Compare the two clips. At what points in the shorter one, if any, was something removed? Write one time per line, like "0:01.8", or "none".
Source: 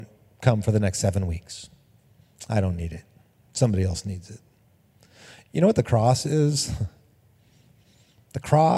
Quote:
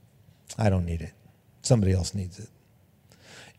none